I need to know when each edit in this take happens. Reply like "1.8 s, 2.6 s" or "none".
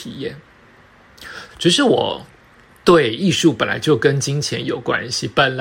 1.5 s

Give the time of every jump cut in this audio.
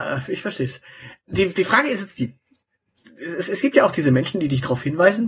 none

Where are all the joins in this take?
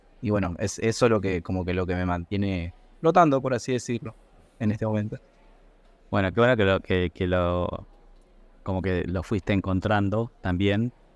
none

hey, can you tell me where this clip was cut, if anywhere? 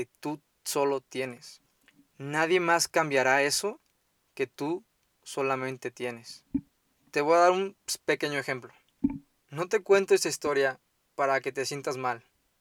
9.5 s

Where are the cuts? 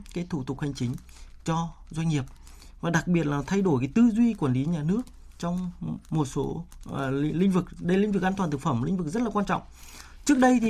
none

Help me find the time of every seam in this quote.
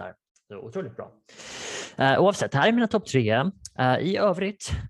none

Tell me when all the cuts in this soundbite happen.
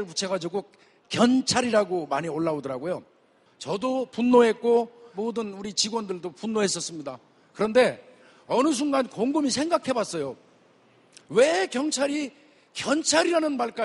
none

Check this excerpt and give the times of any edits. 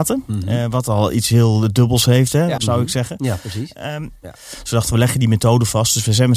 2.6 s, 4.2 s

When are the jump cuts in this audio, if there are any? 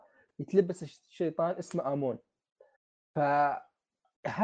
none

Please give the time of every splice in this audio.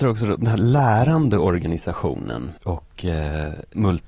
2.6 s

